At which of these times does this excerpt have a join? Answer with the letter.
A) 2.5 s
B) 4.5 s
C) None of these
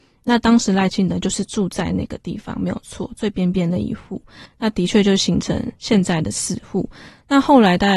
B